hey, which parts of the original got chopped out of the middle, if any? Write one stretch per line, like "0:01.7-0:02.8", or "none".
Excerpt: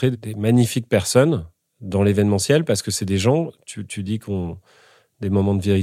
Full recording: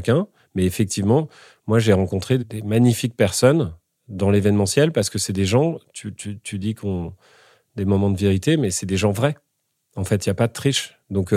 0:06.1-0:06.4